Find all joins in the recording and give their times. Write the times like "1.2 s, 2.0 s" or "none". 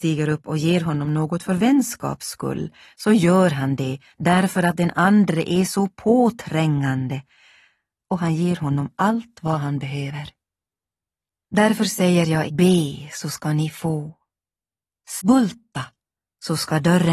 12.5 s, 15.2 s